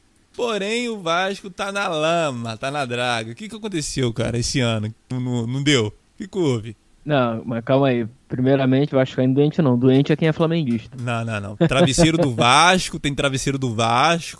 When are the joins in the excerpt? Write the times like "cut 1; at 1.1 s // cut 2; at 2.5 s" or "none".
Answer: cut 1; at 5.1 s // cut 2; at 11.6 s